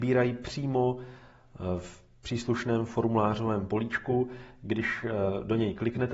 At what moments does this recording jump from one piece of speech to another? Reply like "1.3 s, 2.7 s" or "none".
none